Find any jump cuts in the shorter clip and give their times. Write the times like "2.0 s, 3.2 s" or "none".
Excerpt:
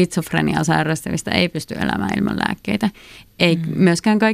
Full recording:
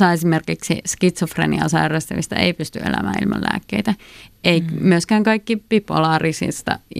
none

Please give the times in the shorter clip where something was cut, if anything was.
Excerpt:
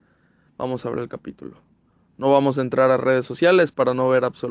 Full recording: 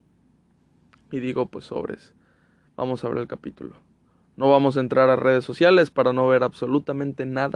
none

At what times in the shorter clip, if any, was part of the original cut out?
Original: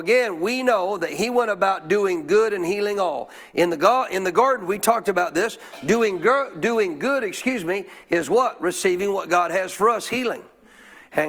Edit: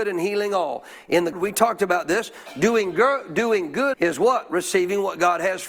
1.3 s, 3.9 s

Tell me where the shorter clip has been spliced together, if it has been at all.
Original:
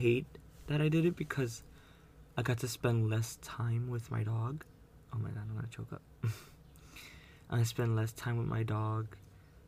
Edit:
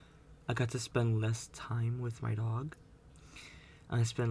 3.1 s

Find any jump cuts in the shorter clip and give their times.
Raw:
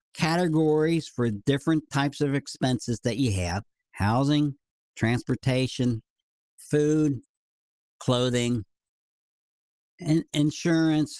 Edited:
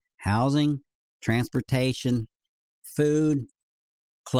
none

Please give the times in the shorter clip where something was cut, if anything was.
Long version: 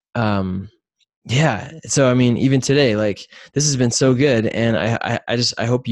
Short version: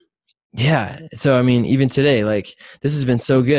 none

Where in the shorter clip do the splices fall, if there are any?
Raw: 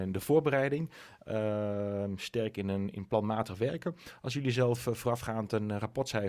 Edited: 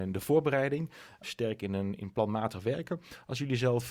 1.2 s

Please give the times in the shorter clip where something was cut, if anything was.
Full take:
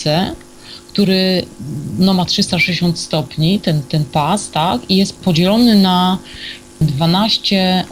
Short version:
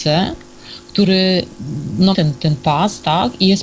2.1 s

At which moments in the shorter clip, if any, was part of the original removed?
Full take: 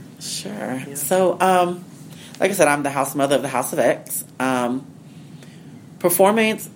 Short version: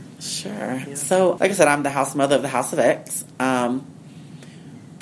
1.4 s

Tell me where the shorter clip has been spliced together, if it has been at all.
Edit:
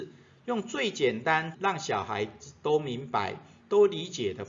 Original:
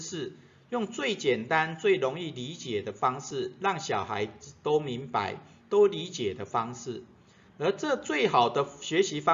1.5 s

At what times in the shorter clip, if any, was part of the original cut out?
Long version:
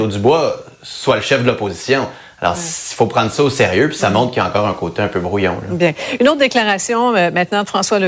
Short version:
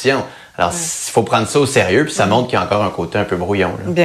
none

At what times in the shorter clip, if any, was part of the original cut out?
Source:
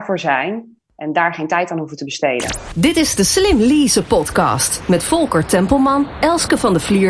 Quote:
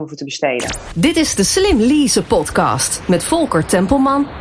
none

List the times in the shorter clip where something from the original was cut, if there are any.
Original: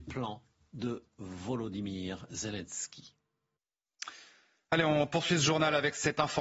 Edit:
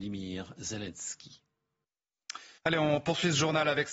2.6 s

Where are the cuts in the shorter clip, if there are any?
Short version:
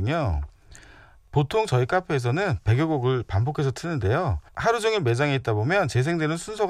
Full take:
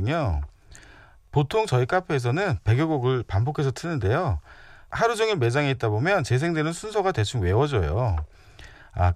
4.5 s

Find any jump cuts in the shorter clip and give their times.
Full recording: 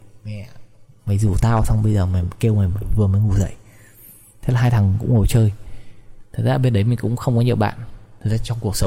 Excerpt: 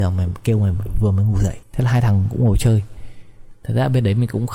1.6 s

